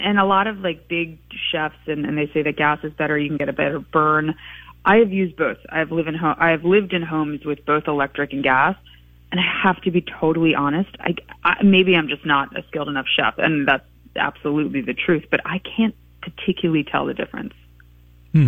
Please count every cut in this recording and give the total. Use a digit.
0